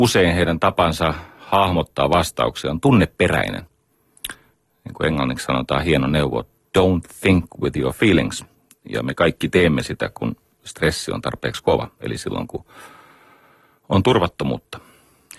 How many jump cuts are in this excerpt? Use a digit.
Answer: 0